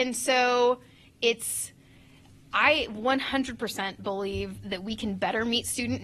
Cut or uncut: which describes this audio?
uncut